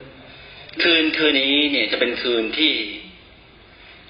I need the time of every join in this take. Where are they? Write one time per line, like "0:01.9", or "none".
0:01.3